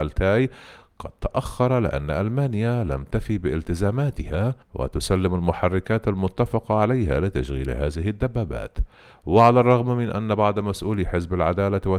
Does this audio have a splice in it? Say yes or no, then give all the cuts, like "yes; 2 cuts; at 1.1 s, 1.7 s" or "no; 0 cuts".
yes; 1 cut; at 4.6 s